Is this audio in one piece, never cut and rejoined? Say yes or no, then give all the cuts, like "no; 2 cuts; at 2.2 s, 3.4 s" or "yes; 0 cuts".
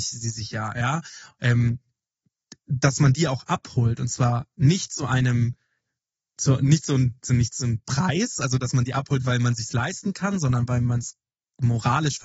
yes; 0 cuts